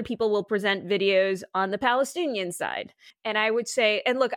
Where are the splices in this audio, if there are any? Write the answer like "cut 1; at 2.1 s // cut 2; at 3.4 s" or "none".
cut 1; at 3.1 s